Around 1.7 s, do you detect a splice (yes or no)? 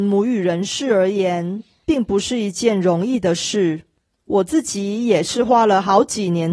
yes